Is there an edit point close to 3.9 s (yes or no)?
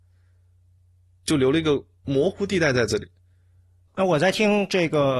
yes